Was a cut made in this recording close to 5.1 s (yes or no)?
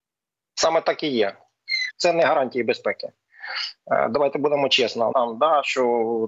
yes